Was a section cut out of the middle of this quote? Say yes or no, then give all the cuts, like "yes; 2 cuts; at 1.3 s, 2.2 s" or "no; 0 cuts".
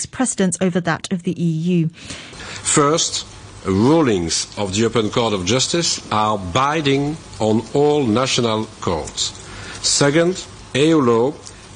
yes; 1 cut; at 2.3 s